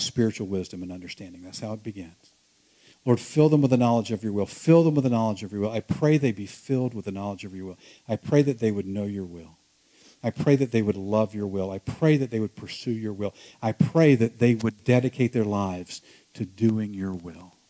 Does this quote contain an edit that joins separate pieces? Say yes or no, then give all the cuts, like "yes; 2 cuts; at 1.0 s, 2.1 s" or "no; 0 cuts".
no; 0 cuts